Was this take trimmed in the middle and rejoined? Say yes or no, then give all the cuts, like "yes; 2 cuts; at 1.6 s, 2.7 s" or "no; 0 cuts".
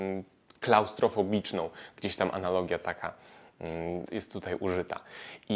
yes; 1 cut; at 4.1 s